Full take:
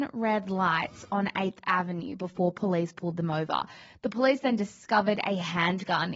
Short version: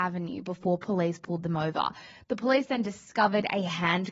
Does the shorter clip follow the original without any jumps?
yes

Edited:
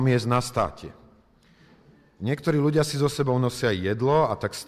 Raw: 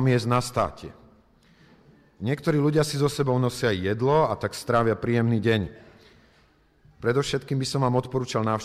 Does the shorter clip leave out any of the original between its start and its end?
no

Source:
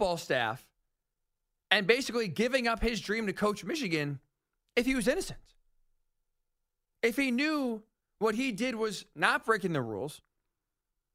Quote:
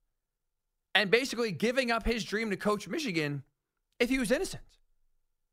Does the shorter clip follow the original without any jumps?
yes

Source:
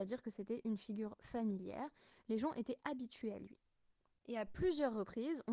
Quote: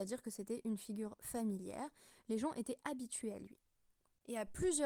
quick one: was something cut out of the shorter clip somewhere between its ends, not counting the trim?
no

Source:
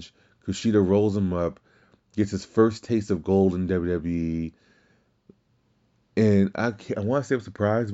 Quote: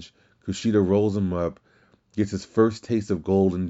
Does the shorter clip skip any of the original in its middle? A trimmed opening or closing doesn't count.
no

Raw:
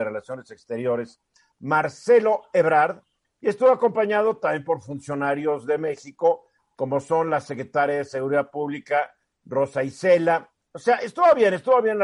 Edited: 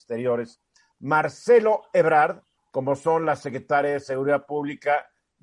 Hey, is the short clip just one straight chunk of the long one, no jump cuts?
no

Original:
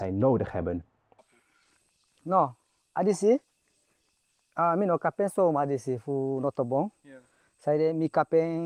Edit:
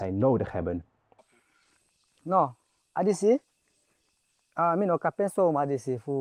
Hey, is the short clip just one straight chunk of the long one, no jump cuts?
yes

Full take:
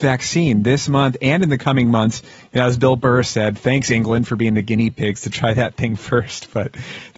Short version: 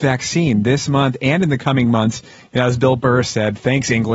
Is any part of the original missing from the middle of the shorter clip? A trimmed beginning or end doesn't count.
no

